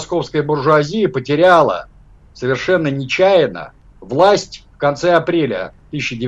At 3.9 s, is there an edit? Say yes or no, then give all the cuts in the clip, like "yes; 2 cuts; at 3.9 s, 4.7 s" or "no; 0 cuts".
yes; 1 cut; at 3.9 s